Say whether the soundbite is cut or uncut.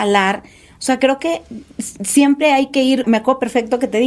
cut